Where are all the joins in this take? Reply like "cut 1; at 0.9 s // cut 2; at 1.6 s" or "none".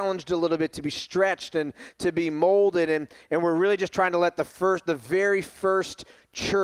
none